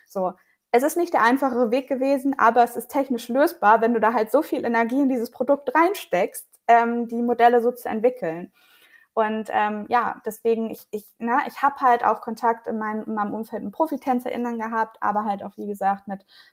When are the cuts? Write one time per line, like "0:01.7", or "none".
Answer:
none